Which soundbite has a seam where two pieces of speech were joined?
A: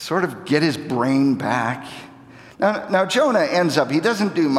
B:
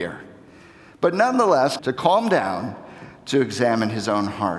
B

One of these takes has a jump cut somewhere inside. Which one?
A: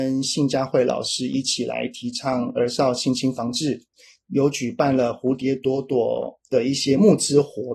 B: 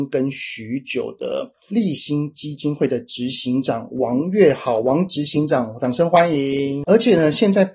B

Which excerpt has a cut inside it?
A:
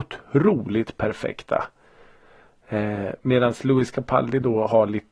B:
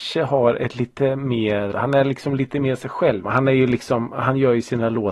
B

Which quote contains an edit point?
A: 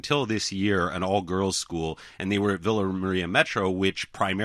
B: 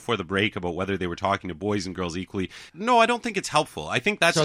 B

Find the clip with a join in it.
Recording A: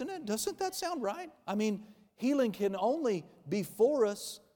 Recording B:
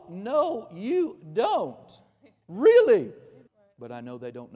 B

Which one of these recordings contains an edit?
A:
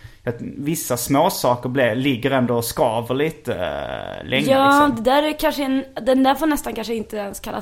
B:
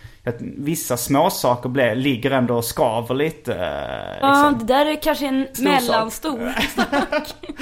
B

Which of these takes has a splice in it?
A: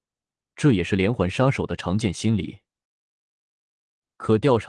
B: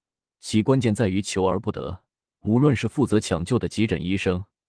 B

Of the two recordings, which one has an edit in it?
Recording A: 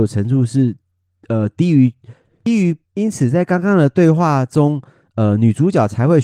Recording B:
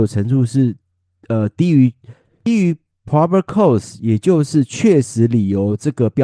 A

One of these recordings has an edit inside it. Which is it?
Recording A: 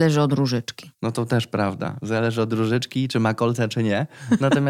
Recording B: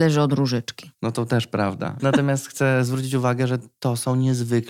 B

